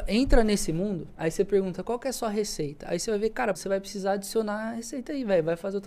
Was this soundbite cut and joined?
yes; 2 cuts; at 1.1 s, 3.5 s

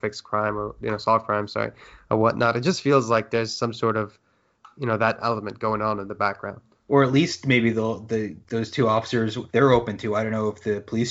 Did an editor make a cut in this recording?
no; 0 cuts

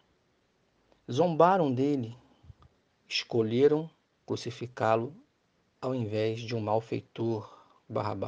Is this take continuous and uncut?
yes; 0 cuts

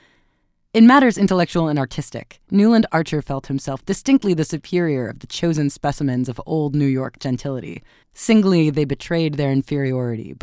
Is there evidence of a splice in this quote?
yes; 1 cut; at 8.0 s

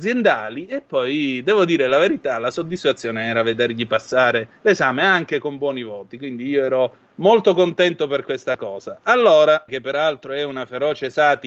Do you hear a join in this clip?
yes; 2 cuts; at 4.6 s, 9.7 s

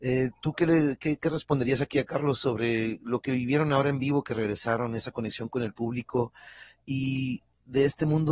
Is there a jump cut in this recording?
yes; 1 cut; at 1.2 s

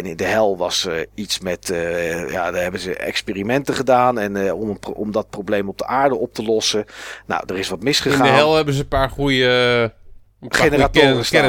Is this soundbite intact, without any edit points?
yes; 0 cuts

